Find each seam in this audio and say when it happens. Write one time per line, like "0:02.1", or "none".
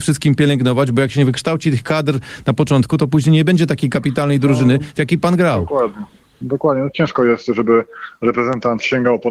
none